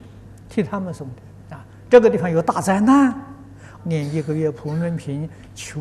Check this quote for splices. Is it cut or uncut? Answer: cut